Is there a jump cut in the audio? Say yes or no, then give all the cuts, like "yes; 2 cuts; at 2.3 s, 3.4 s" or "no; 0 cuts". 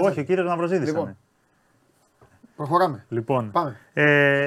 no; 0 cuts